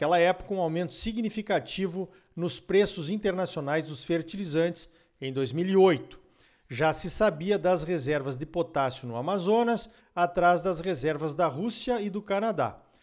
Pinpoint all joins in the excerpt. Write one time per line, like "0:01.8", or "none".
0:06.6
0:10.0